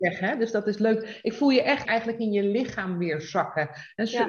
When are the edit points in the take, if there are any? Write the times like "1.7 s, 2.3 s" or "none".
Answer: 1.9 s